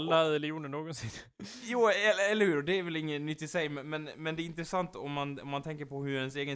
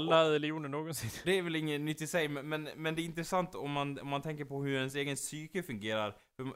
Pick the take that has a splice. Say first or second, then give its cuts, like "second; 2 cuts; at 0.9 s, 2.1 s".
second; 1 cut; at 1.2 s